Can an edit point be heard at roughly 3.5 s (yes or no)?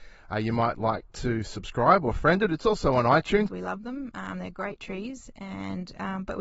yes